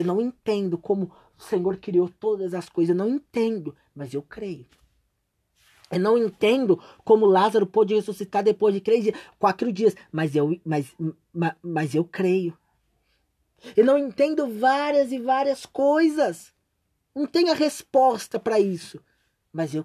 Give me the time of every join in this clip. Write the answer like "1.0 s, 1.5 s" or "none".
none